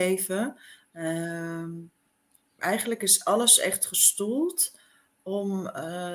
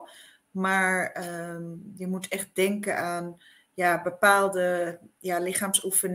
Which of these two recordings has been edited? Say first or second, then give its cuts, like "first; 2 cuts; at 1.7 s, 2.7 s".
first; 1 cut; at 2.4 s